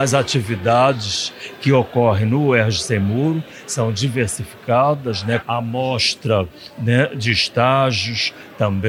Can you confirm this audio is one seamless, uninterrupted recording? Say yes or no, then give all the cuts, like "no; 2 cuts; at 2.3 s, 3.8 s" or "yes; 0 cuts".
no; 1 cut; at 5.4 s